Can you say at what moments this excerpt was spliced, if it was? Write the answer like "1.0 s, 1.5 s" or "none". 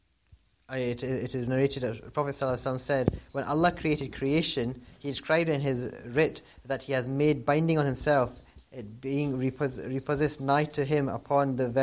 none